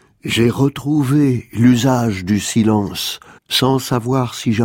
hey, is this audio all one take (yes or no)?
no